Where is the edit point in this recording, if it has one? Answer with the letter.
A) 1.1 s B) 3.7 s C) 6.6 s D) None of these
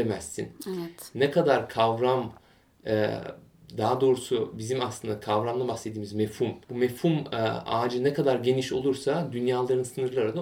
C